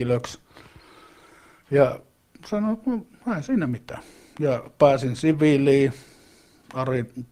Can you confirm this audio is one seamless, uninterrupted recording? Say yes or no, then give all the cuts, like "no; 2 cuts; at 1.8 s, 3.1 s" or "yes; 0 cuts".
yes; 0 cuts